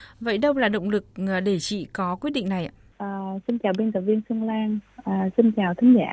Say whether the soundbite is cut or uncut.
cut